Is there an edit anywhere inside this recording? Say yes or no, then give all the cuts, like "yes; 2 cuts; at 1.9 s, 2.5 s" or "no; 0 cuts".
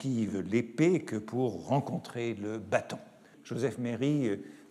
yes; 1 cut; at 3.3 s